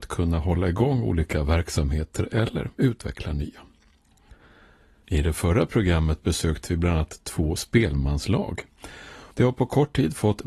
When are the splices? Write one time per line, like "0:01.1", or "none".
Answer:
0:09.3